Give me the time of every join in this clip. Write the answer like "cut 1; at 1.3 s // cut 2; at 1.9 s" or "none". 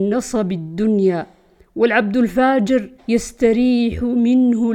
cut 1; at 3.0 s